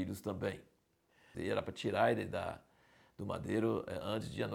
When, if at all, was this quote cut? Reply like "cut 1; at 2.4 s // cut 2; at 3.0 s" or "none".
cut 1; at 1.3 s